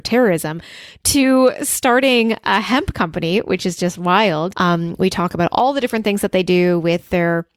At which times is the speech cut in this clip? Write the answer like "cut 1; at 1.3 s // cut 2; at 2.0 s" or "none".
cut 1; at 4.5 s